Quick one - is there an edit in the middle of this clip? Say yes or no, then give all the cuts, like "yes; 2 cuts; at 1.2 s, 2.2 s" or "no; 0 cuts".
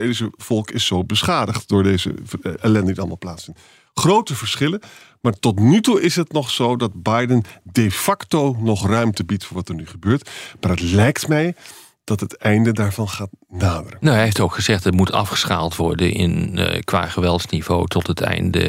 no; 0 cuts